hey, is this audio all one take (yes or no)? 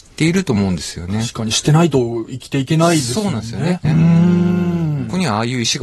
no